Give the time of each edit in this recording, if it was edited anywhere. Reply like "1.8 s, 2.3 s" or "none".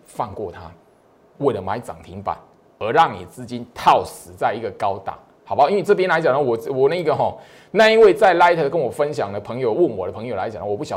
1.4 s